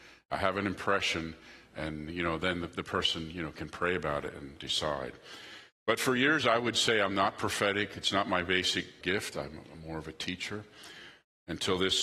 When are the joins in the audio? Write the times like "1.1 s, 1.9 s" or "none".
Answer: 4.6 s, 9.0 s